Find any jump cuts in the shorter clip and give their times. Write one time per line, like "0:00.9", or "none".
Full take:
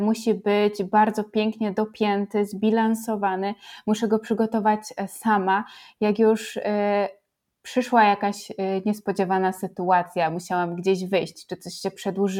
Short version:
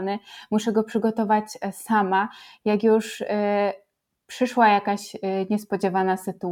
none